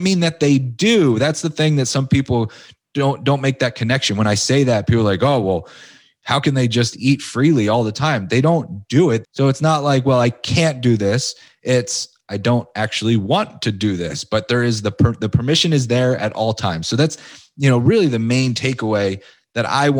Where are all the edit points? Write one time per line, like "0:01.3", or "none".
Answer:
0:09.2